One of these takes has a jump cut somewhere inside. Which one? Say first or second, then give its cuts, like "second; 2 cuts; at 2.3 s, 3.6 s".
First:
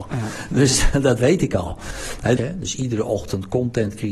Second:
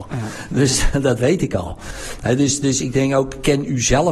first; 1 cut; at 2.4 s